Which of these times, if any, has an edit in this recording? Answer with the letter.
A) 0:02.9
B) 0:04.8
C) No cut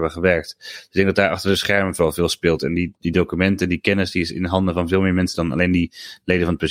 A